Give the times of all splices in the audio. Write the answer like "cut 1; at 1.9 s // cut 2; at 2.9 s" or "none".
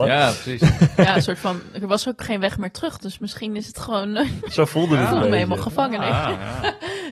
none

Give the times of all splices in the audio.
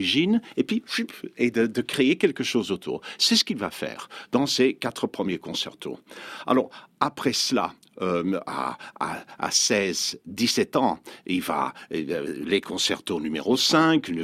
none

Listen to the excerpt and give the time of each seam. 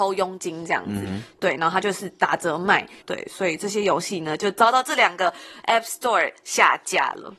cut 1; at 3.0 s

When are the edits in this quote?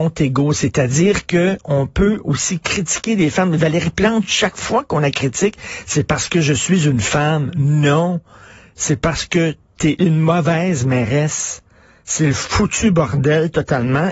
none

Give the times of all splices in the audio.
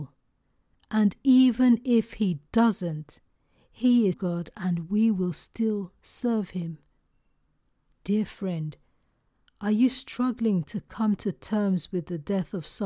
cut 1; at 4.1 s

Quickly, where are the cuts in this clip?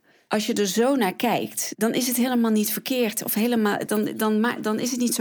cut 1; at 3.9 s

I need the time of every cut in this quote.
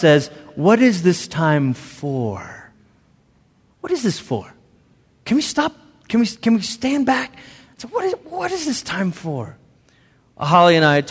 none

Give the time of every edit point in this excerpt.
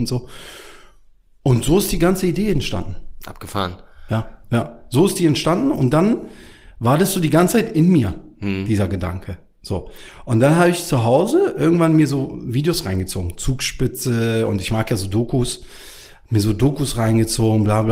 cut 1; at 4.4 s

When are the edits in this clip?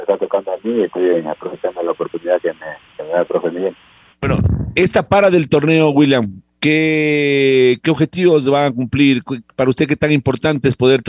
none

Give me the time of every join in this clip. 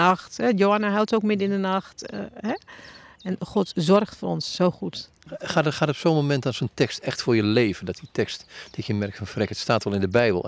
none

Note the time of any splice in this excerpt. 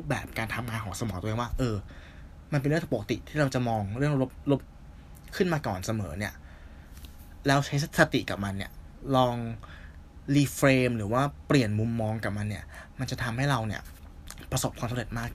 cut 1; at 4.6 s

